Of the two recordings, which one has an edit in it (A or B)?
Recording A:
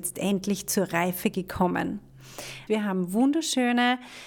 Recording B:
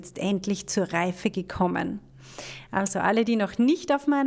A